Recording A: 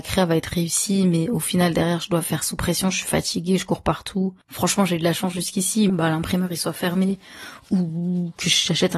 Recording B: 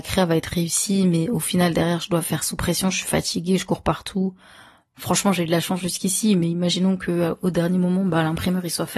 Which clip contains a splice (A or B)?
A